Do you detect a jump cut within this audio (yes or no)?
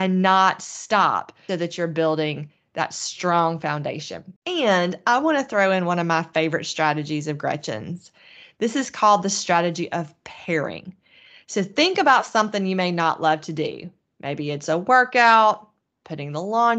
yes